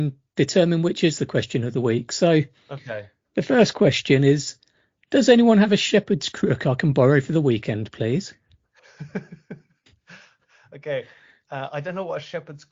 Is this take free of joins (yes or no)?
yes